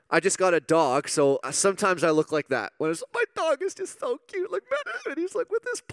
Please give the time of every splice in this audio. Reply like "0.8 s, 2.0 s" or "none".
1.4 s, 4.8 s